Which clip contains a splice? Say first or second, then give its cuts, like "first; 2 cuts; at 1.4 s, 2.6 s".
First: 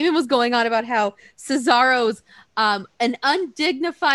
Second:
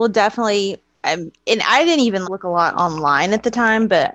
second; 1 cut; at 2.2 s